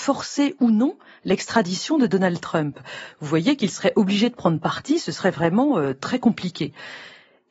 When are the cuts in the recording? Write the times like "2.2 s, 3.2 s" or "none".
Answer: none